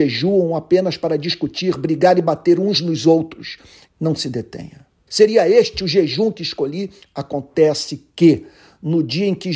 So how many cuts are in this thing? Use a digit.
3